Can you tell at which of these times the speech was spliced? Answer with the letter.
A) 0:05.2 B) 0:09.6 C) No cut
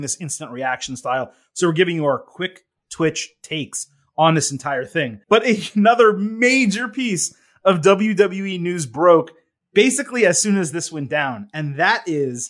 A